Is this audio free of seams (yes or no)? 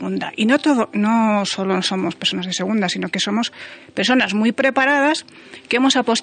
yes